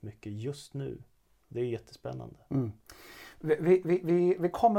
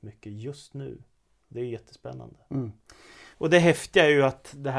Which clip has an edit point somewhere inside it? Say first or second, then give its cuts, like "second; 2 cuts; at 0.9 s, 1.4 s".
second; 1 cut; at 3.3 s